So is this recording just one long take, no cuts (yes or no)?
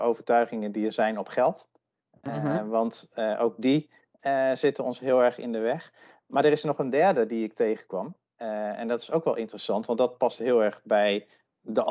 yes